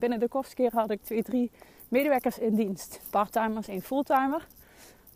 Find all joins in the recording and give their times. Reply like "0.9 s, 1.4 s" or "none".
none